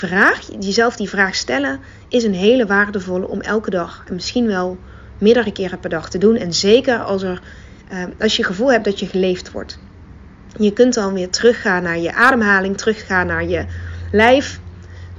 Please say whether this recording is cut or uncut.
uncut